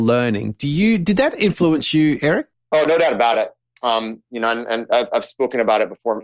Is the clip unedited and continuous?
yes; 0 cuts

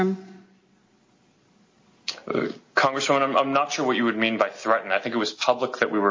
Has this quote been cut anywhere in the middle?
no; 0 cuts

